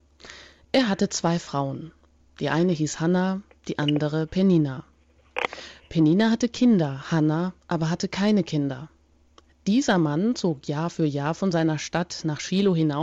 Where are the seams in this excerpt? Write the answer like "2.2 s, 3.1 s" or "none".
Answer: none